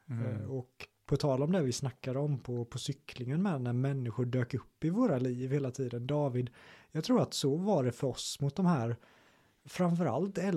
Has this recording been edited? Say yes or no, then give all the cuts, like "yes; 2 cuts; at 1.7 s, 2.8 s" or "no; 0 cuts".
no; 0 cuts